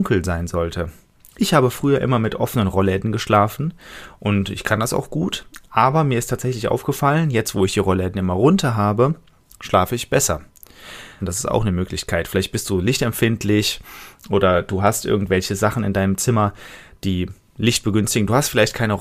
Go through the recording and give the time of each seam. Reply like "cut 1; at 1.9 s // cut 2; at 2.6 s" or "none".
cut 1; at 11.2 s